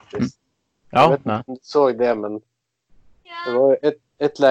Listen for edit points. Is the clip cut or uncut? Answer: uncut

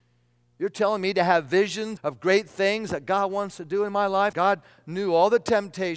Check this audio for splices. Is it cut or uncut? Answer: cut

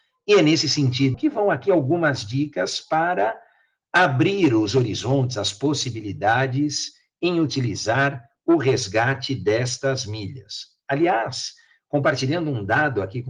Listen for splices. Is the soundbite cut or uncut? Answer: cut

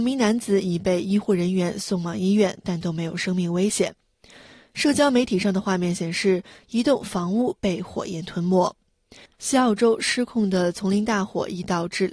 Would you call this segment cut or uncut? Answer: cut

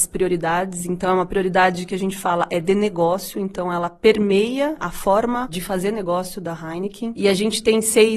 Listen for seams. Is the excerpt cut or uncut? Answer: uncut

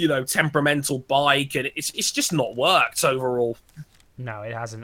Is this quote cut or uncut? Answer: uncut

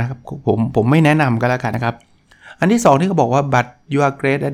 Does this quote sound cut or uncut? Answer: cut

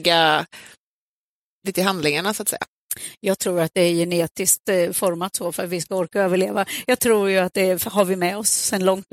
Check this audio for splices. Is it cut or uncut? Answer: uncut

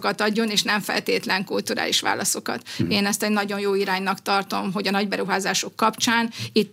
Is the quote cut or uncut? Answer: uncut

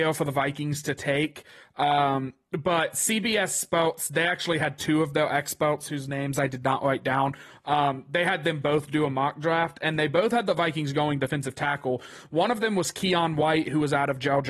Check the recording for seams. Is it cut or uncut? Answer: uncut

